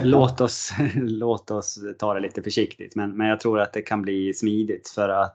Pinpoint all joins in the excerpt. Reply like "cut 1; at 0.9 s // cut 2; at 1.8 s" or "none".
none